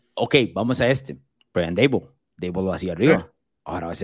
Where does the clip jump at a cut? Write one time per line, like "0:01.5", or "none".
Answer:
none